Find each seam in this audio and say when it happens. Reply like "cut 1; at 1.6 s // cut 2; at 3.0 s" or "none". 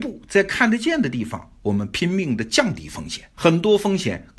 cut 1; at 3.3 s